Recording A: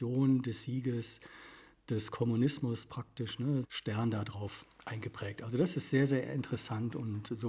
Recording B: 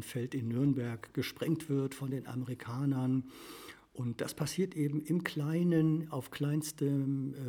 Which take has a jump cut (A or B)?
A